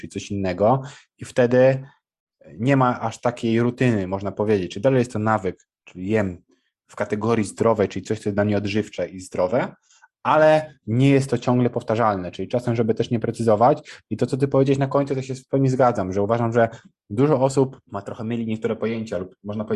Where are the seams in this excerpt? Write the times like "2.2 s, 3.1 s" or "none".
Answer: 17.9 s

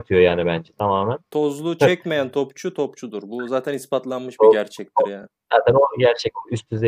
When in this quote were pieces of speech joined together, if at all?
none

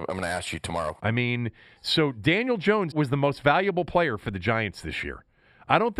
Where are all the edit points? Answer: 1.0 s, 2.9 s

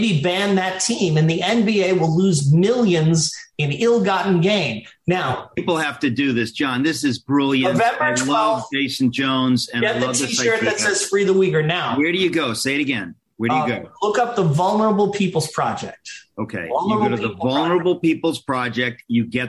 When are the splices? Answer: none

